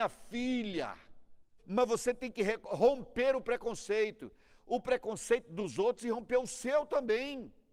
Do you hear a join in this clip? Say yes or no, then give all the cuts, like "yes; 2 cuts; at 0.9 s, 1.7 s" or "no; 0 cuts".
yes; 1 cut; at 1.6 s